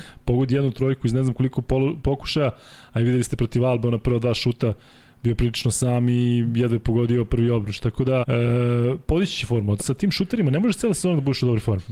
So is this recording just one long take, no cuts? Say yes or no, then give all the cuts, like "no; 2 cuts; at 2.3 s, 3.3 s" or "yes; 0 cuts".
no; 2 cuts; at 8.2 s, 9.8 s